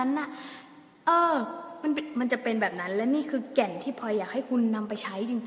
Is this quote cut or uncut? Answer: uncut